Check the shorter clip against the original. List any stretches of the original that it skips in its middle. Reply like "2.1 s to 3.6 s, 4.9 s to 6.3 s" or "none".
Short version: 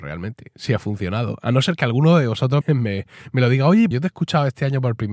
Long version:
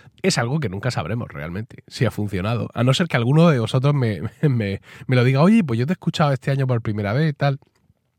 3.9 s to 4.4 s, 5.7 s to 5.8 s